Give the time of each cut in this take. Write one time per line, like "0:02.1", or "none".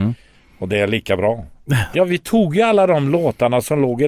0:01.9

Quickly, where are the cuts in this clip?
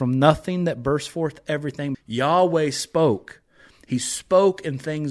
0:01.9

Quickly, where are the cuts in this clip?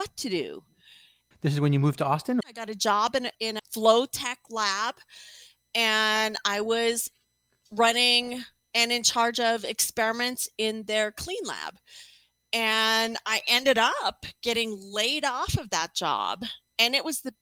0:02.4

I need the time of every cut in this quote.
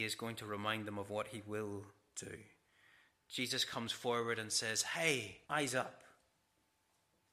0:05.4

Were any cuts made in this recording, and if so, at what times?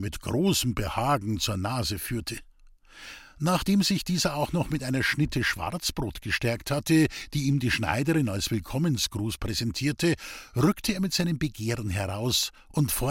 none

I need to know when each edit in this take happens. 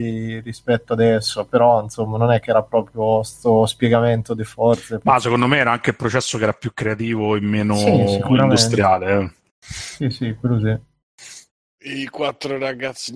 none

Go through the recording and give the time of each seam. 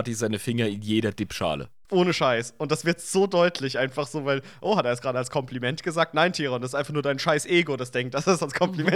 none

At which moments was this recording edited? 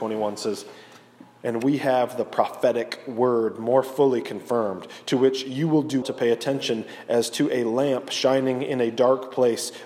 0:06.0

